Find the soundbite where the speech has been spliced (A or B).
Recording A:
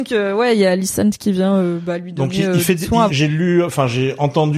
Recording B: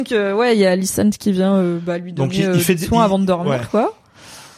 A